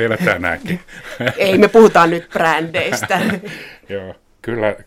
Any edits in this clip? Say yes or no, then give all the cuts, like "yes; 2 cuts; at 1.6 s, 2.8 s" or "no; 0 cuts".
no; 0 cuts